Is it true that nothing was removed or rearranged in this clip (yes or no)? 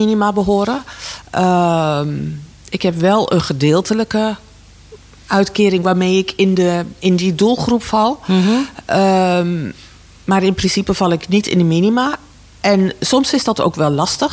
yes